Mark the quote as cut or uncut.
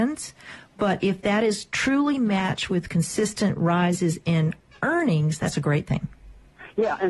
uncut